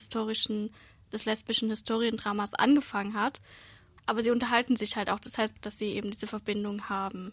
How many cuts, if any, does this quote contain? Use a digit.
2